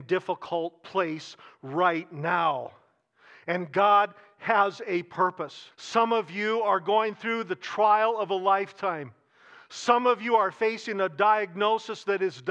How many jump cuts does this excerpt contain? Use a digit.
1